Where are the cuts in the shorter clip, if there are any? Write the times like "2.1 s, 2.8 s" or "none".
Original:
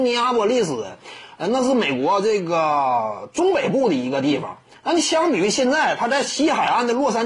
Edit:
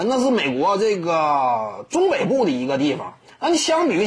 none